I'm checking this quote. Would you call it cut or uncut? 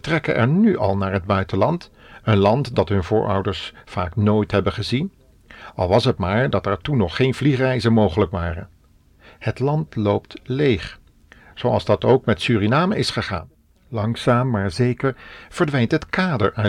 uncut